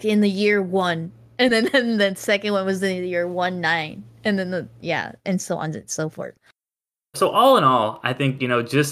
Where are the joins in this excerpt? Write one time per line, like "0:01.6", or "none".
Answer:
0:07.1